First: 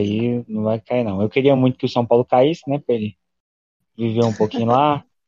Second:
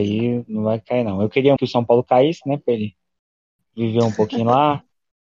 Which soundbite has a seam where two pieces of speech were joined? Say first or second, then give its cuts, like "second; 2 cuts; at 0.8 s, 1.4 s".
second; 1 cut; at 1.6 s